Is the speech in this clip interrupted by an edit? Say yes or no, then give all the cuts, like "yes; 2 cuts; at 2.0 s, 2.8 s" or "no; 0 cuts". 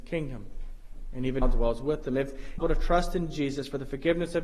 yes; 2 cuts; at 1.4 s, 2.6 s